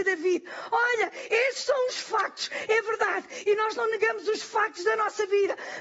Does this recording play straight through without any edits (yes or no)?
yes